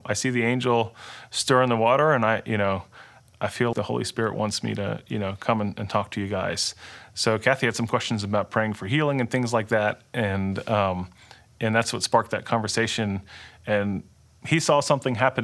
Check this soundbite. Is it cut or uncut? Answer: cut